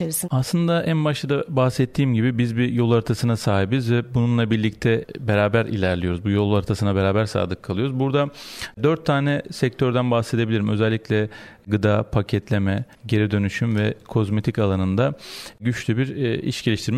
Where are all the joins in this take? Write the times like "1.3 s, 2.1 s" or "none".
12.9 s